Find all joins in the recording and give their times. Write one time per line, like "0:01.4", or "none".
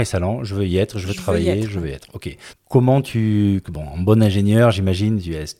0:02.5
0:03.6